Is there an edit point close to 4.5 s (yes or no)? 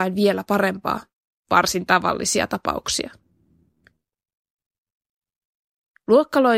no